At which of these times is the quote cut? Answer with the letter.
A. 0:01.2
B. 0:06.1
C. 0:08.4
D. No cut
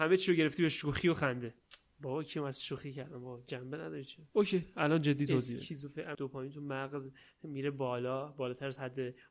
B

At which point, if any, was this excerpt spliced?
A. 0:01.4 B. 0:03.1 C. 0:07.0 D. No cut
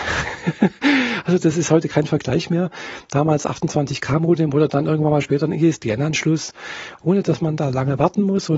C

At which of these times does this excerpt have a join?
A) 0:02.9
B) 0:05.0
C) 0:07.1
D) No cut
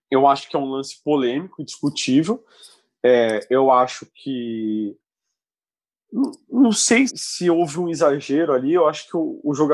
C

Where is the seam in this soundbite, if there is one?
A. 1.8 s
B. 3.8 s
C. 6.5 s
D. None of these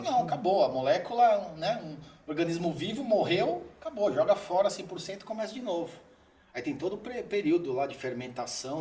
D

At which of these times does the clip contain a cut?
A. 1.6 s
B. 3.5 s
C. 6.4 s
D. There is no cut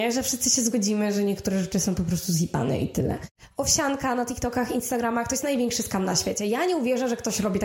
D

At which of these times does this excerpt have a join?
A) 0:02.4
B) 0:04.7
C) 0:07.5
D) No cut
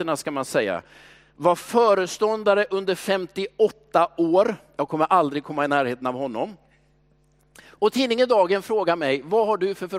D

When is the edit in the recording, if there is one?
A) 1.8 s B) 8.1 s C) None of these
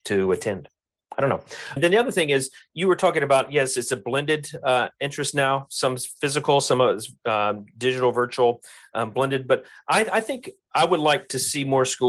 A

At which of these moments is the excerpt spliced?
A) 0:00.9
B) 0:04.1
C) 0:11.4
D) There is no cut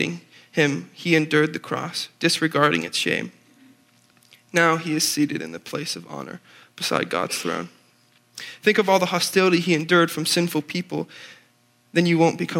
D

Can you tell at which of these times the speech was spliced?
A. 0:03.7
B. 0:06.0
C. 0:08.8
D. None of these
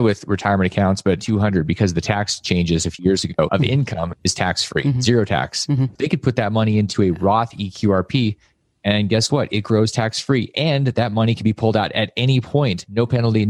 B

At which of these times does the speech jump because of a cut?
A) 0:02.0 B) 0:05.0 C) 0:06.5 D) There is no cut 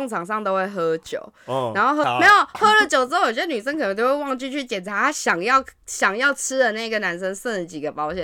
A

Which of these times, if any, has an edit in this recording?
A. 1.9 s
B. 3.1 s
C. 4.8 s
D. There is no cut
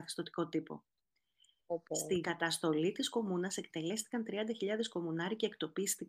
D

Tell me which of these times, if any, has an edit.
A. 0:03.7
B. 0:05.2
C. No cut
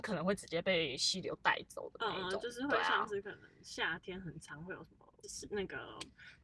B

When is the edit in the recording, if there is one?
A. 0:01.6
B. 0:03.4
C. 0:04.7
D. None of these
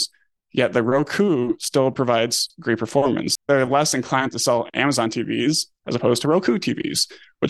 B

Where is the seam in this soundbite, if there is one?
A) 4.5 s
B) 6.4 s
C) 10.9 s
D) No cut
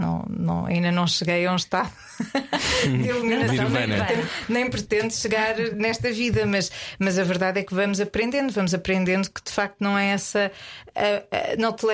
D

